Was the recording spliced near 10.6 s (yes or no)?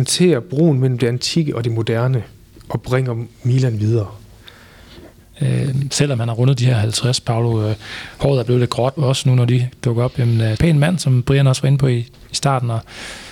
yes